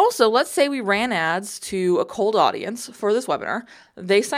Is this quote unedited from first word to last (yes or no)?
yes